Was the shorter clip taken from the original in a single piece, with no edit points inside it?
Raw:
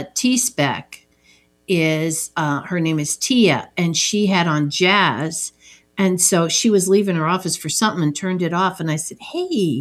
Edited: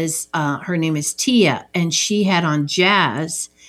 yes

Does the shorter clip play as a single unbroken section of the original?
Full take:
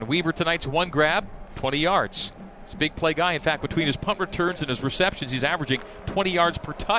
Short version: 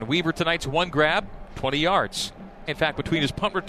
no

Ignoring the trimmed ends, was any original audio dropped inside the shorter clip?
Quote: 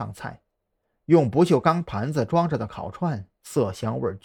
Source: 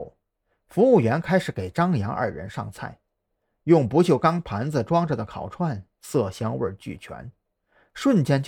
no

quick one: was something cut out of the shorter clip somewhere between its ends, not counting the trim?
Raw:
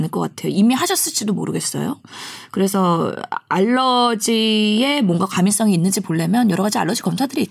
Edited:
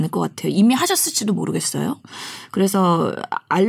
no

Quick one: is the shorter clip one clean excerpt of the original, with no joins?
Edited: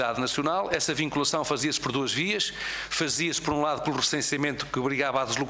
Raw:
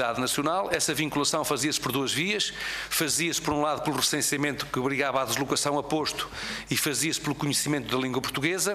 yes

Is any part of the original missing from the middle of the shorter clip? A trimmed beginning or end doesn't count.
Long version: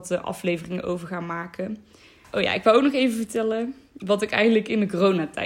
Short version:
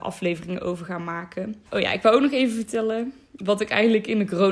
yes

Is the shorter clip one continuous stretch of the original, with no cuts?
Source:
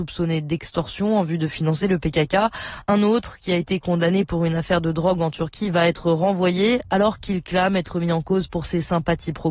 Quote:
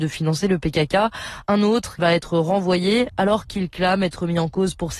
no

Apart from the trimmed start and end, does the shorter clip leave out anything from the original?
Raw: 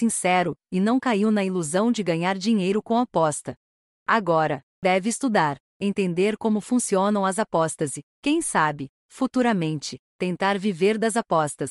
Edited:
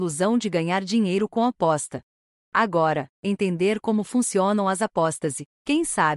yes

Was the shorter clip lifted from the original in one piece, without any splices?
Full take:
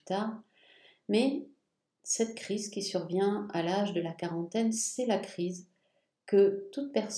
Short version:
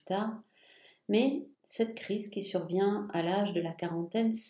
no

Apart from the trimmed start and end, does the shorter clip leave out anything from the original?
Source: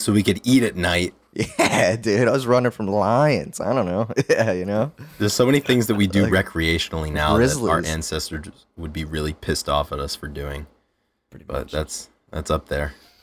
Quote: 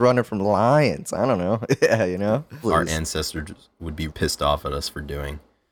yes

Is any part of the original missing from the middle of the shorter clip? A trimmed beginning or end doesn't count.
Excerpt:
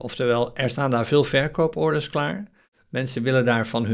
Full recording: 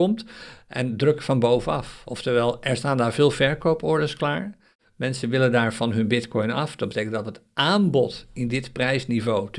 no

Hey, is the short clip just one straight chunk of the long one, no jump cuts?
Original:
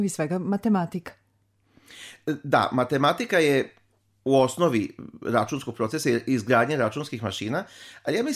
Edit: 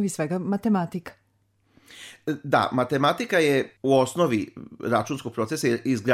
no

